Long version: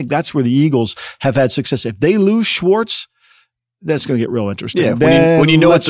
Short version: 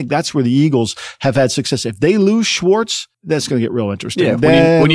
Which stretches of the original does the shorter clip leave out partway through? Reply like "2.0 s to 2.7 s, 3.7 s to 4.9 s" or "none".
3.1 s to 3.7 s